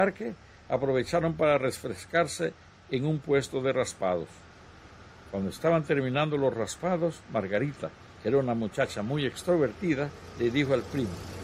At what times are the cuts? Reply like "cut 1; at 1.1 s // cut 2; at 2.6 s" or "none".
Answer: none